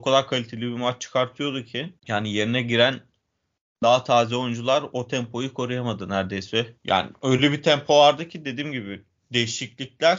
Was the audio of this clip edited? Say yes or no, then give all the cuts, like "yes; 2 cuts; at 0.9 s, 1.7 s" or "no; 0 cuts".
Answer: yes; 2 cuts; at 2.0 s, 6.8 s